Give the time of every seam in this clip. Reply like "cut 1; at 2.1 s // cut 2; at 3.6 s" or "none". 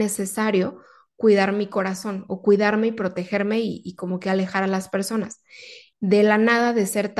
cut 1; at 5.9 s